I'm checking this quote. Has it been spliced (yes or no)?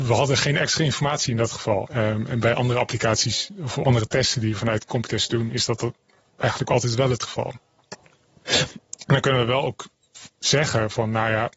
yes